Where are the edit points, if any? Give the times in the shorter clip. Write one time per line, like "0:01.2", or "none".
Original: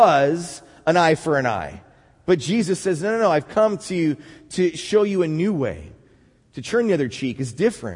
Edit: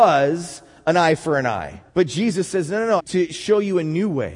0:01.9
0:03.0